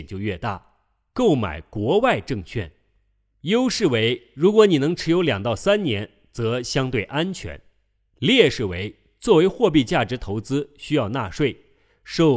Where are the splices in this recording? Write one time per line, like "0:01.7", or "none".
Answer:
none